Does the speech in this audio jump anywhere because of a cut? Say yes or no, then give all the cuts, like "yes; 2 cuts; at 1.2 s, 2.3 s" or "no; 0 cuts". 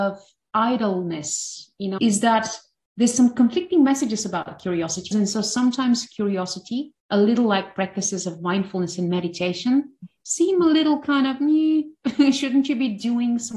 yes; 3 cuts; at 2.0 s, 5.1 s, 7.0 s